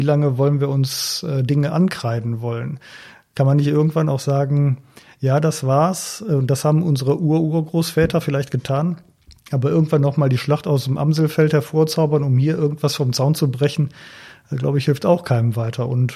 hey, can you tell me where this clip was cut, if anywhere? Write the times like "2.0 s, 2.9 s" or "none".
none

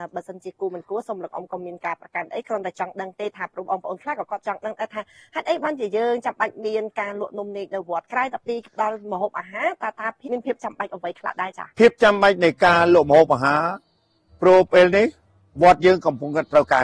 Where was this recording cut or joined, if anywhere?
10.2 s, 11.7 s

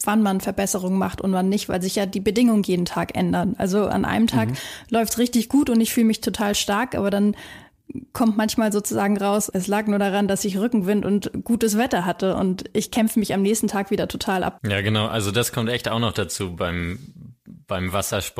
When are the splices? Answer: 9.5 s, 14.6 s

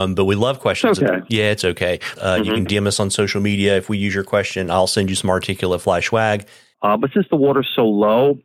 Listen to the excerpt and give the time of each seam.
2.2 s, 6.7 s

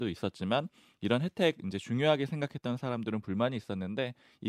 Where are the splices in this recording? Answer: none

